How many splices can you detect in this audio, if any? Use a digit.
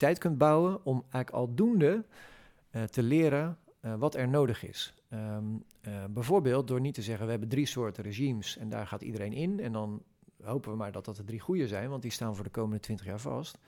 0